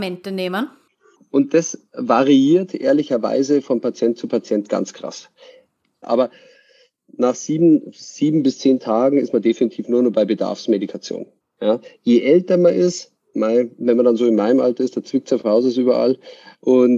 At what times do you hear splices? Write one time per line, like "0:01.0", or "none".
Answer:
0:01.2
0:06.0
0:11.4